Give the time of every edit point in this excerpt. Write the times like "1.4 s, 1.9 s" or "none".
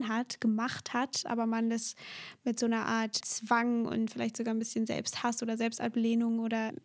1.2 s, 3.2 s